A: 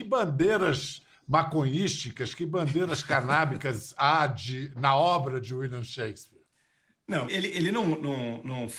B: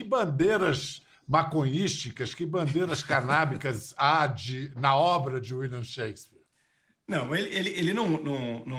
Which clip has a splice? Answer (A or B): A